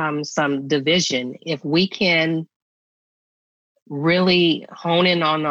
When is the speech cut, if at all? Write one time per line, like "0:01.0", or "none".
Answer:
0:01.4

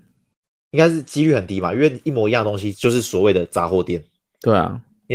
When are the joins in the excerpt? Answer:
0:02.7

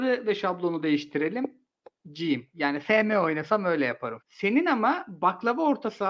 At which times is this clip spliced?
0:04.2

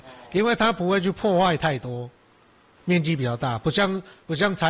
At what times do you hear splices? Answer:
0:02.8

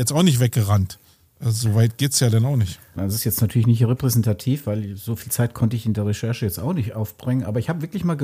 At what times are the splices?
0:03.0

